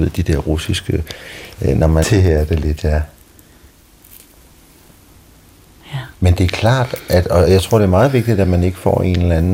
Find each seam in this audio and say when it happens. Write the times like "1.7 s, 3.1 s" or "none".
2.0 s, 6.1 s